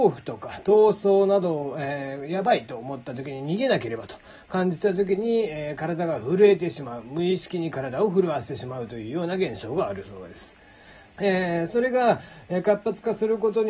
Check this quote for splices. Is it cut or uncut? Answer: cut